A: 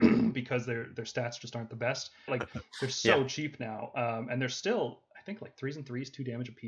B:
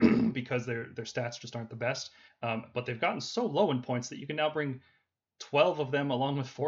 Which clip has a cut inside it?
A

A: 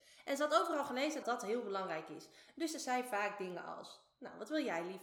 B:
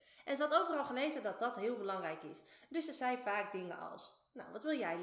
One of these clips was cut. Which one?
A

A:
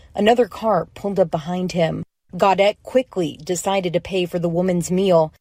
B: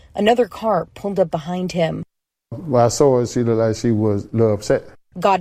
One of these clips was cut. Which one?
A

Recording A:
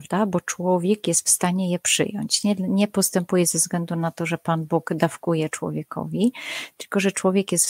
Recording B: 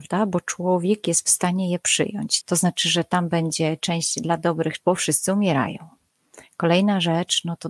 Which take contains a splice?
B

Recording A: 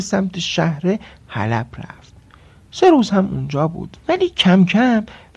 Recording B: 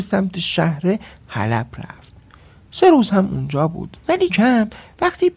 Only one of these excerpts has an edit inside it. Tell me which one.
B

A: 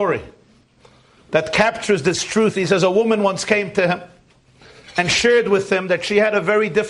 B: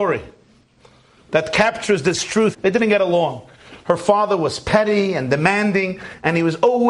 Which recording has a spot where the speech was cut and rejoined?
B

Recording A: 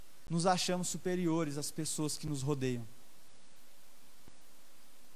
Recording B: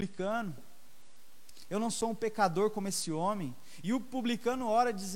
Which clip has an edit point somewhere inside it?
B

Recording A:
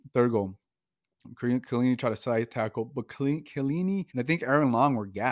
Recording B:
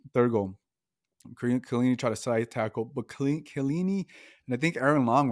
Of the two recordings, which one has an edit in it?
A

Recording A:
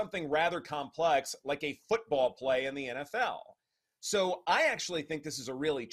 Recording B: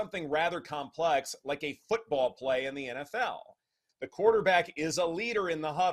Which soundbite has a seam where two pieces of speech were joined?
B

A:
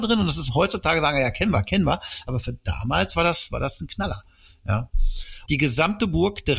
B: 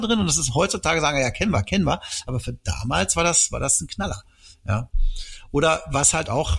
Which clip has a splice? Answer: A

